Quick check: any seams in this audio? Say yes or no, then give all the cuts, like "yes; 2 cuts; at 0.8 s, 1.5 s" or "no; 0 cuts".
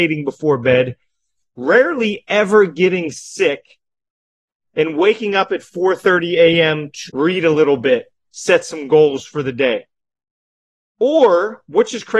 yes; 1 cut; at 7.1 s